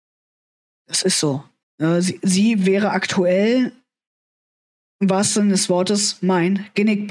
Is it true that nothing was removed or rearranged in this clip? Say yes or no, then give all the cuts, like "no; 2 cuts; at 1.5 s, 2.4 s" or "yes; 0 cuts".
no; 1 cut; at 1.6 s